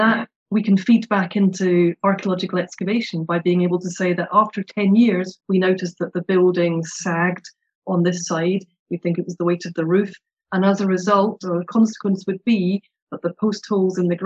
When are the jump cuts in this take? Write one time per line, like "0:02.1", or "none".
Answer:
0:05.4